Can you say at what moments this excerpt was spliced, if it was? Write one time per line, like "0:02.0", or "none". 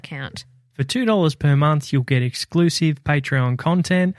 none

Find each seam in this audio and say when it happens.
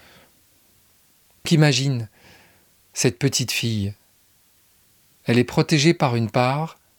0:01.5

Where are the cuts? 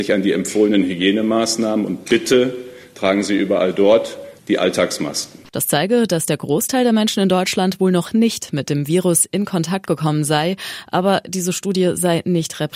0:04.4
0:05.5

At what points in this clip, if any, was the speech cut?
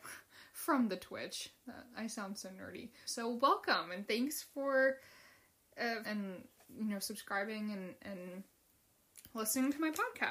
0:03.1
0:06.0

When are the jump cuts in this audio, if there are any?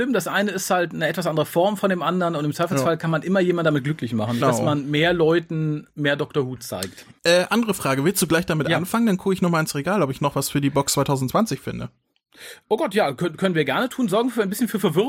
0:04.4
0:07.2

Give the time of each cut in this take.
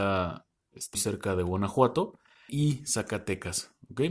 0:00.9
0:02.5

